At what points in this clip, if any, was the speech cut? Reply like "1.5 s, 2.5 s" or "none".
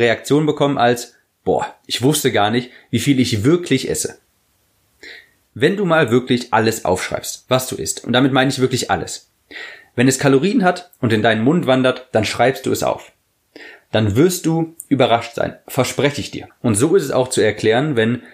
16.5 s